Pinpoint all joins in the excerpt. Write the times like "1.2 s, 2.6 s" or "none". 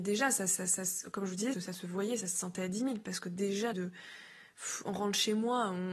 1.5 s, 3.7 s